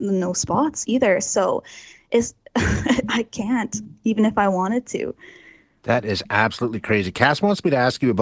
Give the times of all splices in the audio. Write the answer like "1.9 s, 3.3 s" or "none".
none